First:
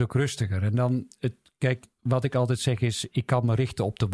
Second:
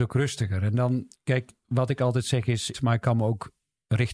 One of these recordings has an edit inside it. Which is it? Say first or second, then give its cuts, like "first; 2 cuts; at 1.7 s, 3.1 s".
second; 2 cuts; at 1.2 s, 2.7 s